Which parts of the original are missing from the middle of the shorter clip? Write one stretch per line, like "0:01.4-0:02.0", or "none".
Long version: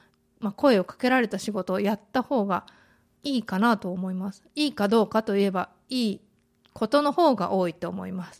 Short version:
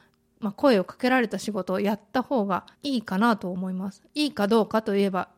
0:02.7-0:03.1